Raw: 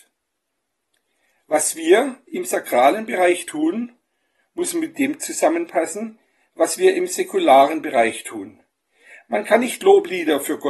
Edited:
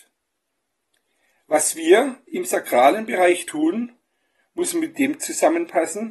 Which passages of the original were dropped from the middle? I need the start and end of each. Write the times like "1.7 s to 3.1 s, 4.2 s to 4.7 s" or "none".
none

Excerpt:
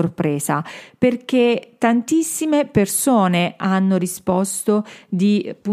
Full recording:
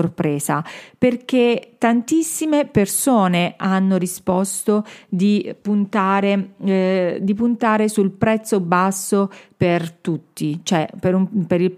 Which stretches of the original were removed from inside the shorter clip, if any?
none

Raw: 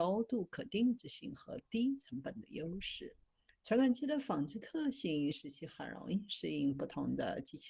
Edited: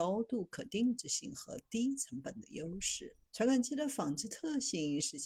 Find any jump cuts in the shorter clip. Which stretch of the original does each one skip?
3.2 s to 3.6 s

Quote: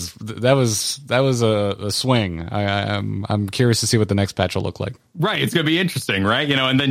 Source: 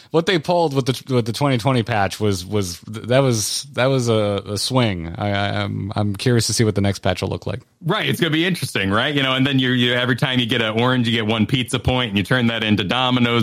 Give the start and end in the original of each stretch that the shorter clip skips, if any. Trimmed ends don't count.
none

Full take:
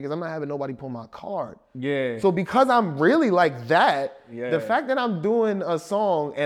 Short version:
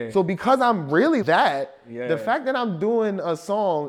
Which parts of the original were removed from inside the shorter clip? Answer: 3.3 s to 3.6 s

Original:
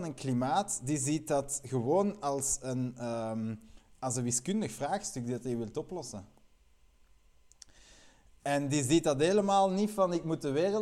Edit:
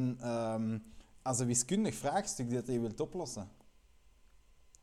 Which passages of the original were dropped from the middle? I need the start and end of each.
none

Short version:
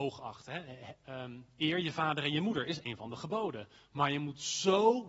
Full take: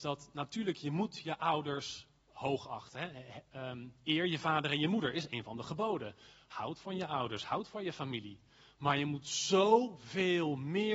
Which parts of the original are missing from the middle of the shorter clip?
6.2 s to 8.6 s

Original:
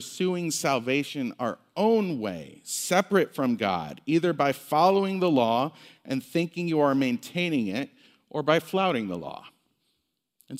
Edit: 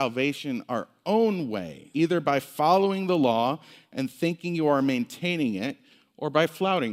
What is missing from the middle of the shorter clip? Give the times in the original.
2.6 s to 4.0 s

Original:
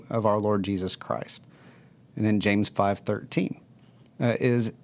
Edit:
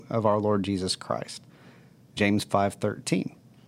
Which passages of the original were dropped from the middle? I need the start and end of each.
2.2 s to 2.4 s

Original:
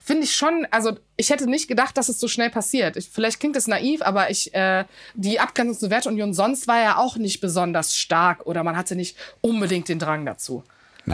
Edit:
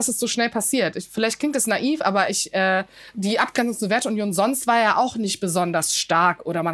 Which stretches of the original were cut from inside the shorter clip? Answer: none

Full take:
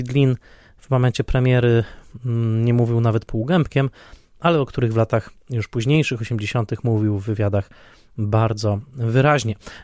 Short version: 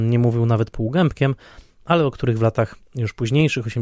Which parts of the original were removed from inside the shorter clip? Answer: none

